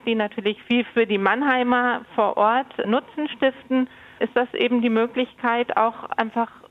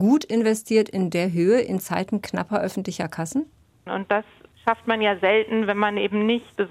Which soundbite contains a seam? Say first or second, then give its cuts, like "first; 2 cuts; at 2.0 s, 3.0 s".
second; 1 cut; at 3.9 s